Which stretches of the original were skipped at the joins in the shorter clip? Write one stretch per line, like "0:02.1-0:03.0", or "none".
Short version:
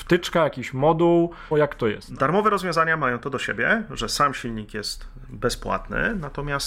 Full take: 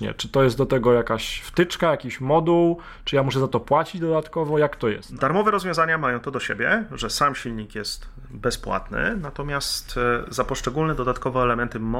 0:03.0-0:04.5